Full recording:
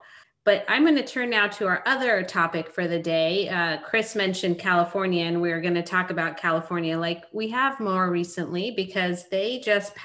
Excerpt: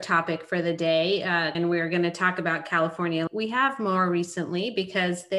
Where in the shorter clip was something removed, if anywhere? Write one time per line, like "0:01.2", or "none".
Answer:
0:01.5
0:03.3